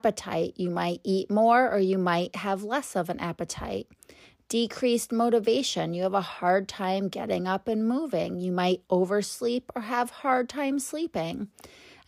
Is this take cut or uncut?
uncut